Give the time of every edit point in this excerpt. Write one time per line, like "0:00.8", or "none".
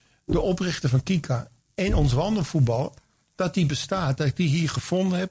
none